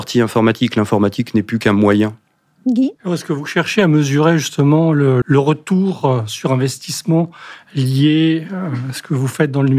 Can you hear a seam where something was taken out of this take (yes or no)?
yes